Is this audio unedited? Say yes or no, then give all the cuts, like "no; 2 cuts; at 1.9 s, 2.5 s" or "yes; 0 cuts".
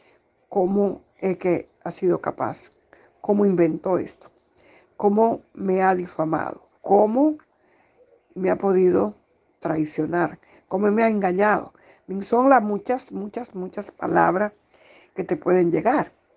no; 1 cut; at 6.7 s